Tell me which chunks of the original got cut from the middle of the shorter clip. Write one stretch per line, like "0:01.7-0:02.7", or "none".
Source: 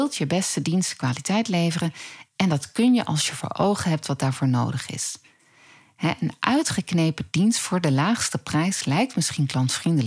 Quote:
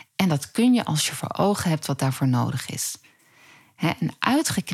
none